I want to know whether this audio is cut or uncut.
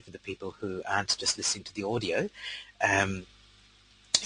uncut